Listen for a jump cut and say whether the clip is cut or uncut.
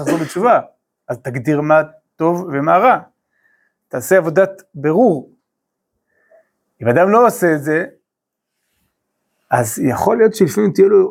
uncut